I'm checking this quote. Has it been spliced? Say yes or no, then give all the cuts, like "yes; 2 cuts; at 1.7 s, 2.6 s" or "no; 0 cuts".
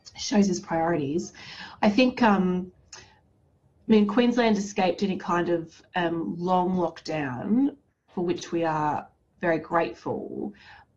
no; 0 cuts